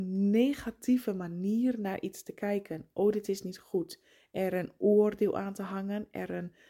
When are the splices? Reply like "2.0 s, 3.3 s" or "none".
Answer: none